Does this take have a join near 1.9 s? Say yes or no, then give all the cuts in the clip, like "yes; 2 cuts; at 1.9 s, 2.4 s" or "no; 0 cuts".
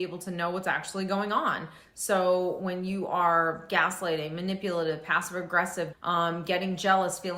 yes; 2 cuts; at 1.9 s, 5.9 s